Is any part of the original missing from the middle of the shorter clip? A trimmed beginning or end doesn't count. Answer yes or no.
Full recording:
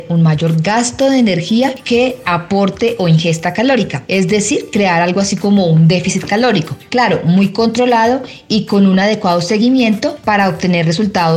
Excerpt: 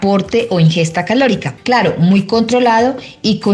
yes